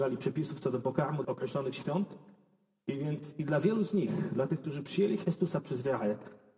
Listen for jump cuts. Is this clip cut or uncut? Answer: cut